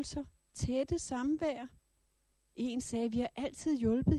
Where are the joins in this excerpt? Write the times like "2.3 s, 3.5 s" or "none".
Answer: 2.3 s